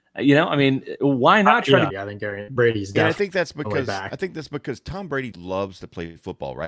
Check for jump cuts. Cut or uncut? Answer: cut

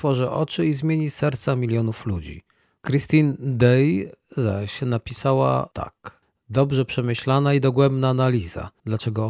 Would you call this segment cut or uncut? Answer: cut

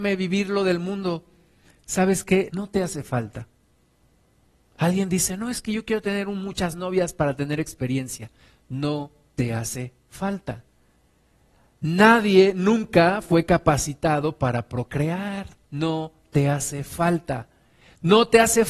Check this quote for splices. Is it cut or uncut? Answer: cut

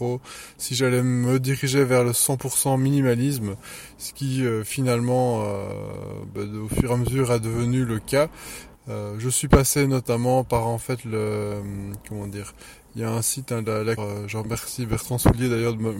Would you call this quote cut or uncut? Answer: cut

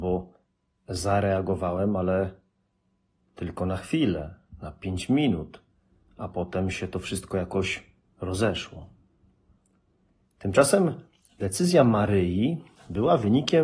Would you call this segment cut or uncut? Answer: uncut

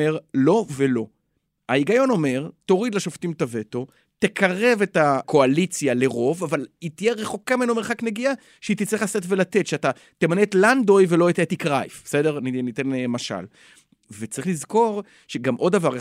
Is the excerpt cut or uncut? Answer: uncut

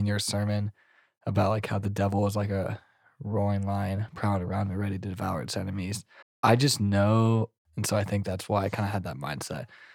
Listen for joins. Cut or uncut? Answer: cut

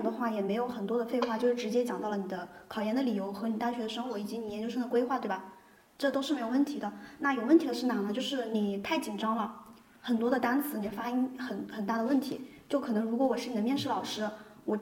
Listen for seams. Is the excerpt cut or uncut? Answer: uncut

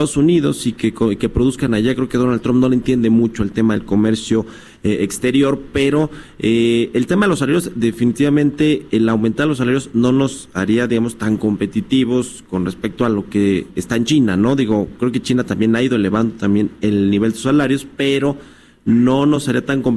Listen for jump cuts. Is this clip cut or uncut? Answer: uncut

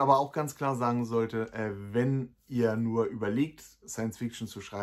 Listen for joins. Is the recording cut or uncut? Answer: uncut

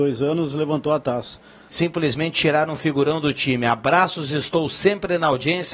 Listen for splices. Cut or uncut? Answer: cut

